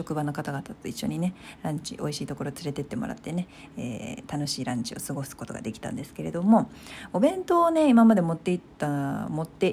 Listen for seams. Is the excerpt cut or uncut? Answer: uncut